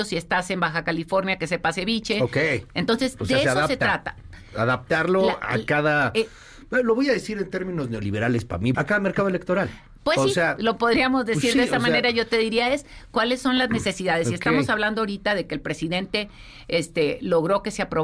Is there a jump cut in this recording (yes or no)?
yes